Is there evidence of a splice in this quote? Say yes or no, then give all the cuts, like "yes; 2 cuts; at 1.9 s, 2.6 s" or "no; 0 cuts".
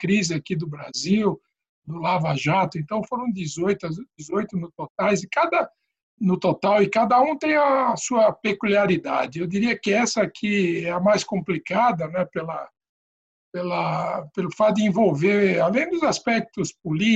no; 0 cuts